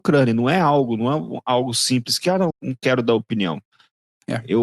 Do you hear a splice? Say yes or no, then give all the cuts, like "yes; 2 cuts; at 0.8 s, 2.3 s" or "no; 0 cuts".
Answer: yes; 1 cut; at 2.5 s